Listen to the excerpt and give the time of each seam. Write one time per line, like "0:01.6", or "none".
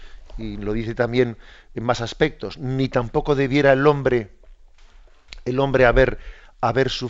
none